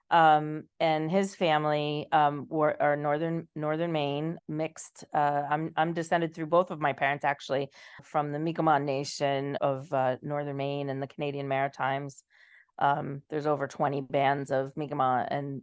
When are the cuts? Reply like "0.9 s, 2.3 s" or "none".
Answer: 4.4 s, 8.0 s, 9.6 s